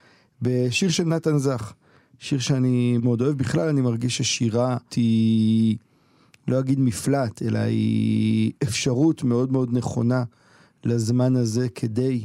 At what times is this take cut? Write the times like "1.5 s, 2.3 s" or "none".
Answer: 3.0 s, 4.9 s, 8.6 s

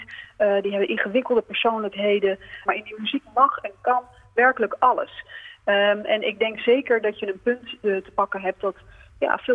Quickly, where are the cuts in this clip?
2.7 s

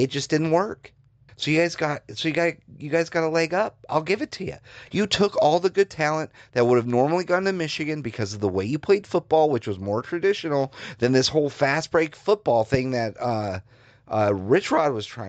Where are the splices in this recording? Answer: 1.3 s, 4.9 s

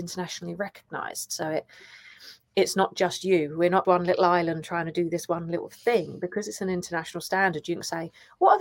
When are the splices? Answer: 3.8 s

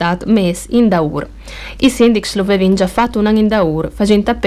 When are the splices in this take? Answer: 1.8 s

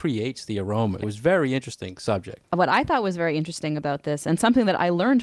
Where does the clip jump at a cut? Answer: 1.0 s

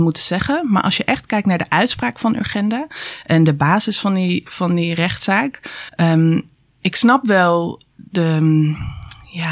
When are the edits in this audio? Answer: 5.9 s

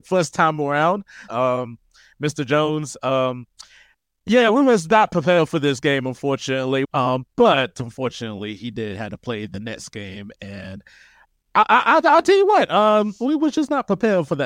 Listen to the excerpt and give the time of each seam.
1.3 s, 6.8 s

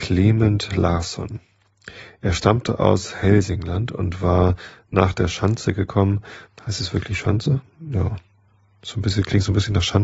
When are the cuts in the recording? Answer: 6.5 s

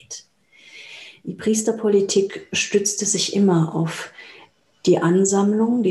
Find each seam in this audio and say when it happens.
none

